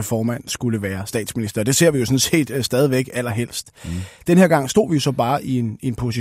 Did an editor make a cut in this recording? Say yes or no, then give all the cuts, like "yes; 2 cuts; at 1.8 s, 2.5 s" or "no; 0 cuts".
no; 0 cuts